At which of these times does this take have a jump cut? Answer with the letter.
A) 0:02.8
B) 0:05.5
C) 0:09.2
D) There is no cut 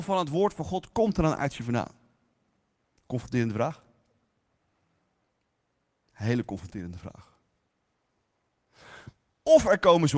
D